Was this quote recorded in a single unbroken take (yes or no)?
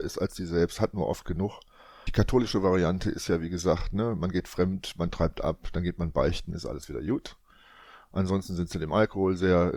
yes